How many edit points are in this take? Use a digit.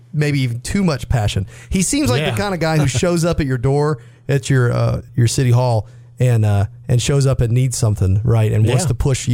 1